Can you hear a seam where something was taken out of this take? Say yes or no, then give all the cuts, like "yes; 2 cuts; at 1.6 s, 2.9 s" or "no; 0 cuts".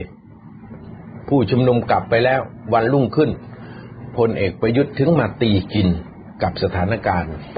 no; 0 cuts